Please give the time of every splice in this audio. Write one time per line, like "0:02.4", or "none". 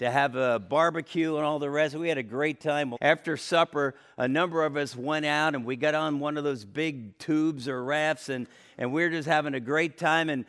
0:03.0

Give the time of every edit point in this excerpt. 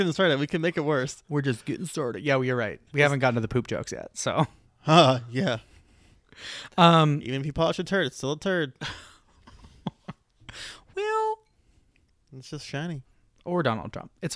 0:02.9

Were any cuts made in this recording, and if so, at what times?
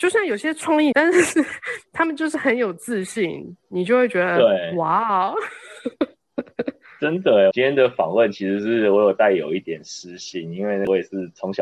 0:00.9
0:07.5

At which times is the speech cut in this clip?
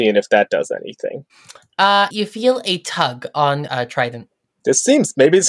0:02.1
0:03.7

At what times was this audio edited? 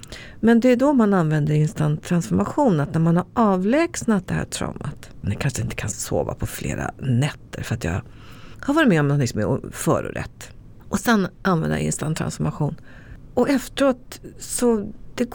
0:05.2

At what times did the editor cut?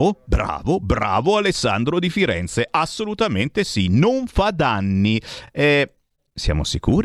none

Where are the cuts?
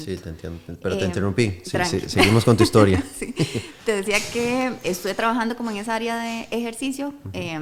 0:04.8

